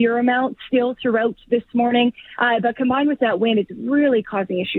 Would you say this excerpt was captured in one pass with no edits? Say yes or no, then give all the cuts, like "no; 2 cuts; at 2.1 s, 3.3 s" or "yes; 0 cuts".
yes; 0 cuts